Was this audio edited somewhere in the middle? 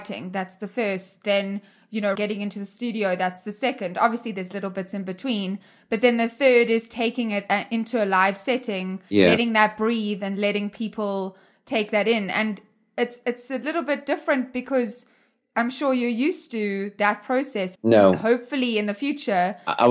yes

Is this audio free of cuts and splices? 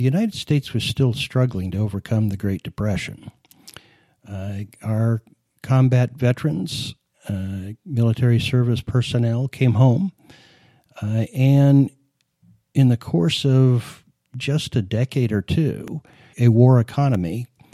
no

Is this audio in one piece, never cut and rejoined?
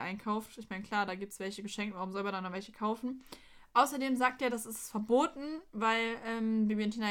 yes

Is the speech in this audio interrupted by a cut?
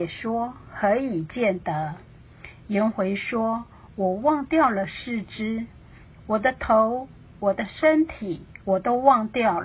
yes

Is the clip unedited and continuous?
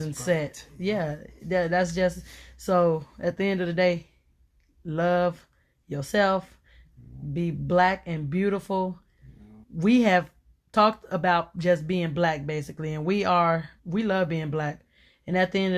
no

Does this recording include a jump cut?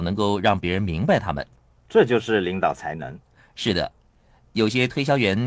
no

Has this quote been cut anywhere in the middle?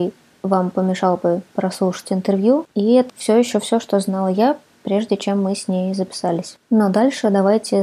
yes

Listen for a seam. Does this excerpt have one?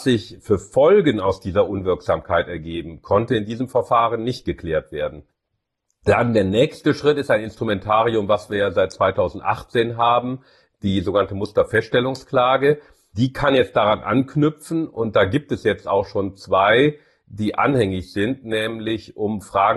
no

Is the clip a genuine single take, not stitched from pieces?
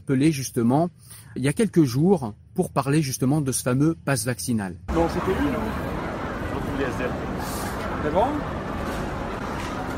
no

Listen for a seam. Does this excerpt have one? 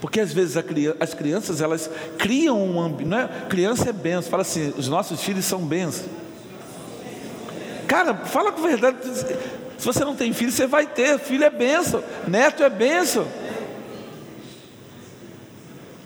no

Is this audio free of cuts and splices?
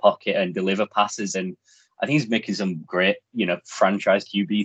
yes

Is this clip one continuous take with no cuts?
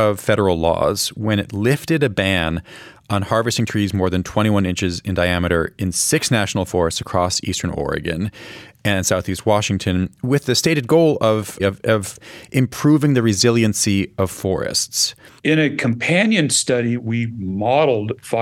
no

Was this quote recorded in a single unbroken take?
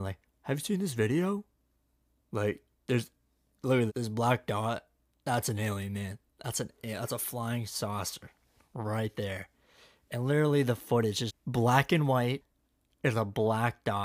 no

